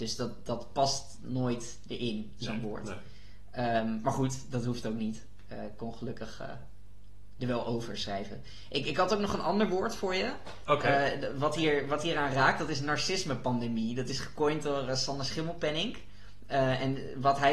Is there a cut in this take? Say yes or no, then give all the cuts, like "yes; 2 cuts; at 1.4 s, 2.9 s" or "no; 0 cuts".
no; 0 cuts